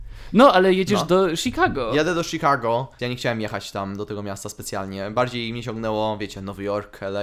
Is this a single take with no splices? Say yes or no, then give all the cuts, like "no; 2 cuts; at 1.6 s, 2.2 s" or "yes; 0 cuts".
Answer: no; 1 cut; at 3.0 s